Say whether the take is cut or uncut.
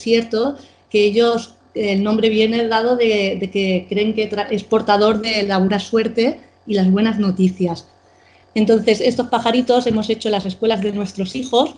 uncut